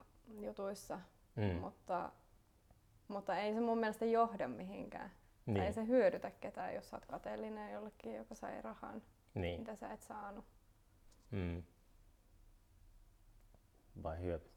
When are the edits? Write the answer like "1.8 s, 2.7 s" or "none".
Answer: none